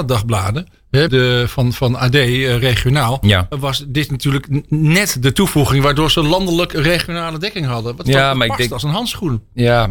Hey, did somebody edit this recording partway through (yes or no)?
yes